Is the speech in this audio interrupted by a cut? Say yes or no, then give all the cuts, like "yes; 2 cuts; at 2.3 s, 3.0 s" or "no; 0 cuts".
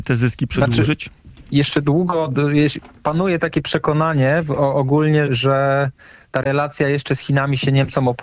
yes; 1 cut; at 5.3 s